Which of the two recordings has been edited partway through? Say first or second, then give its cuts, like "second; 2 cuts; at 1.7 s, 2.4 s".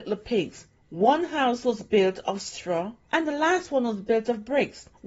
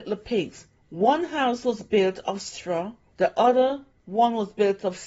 first; 1 cut; at 3.1 s